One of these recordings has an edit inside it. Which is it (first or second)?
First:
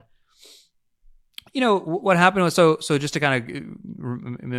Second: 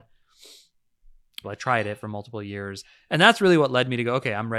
second